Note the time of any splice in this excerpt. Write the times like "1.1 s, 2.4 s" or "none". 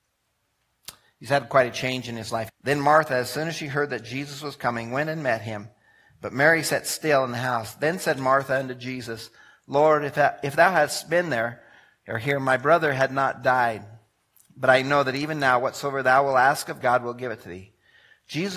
2.5 s, 16.8 s